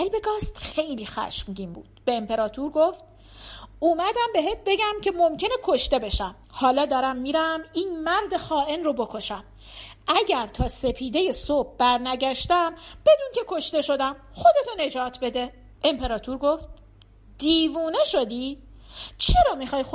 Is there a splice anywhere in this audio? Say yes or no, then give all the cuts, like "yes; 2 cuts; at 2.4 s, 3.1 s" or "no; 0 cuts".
yes; 2 cuts; at 6.4 s, 15.7 s